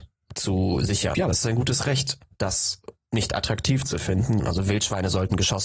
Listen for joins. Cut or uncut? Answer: cut